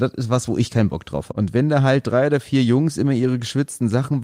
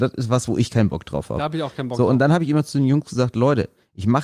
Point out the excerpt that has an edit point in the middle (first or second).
first